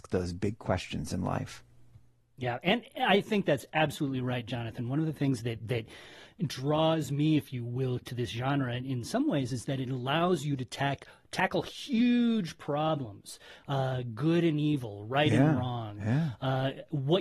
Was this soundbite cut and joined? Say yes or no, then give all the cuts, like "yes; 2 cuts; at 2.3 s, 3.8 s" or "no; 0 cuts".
yes; 1 cut; at 8.0 s